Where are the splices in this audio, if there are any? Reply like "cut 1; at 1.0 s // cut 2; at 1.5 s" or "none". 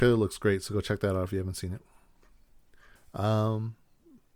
cut 1; at 3.0 s